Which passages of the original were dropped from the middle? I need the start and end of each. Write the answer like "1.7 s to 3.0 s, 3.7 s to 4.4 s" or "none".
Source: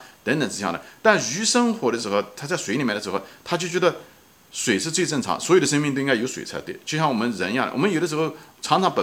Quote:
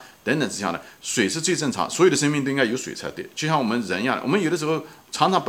1.0 s to 4.5 s